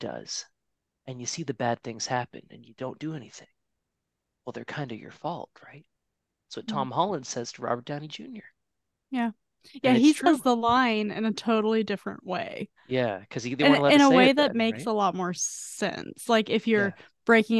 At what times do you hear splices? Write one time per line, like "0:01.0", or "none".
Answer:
none